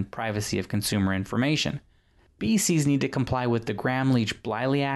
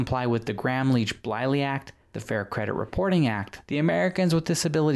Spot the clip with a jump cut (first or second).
second